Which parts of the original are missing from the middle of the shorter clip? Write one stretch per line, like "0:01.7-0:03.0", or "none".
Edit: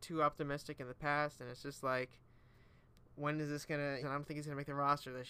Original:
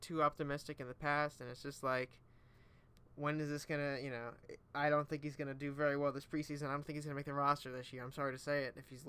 0:04.0-0:06.6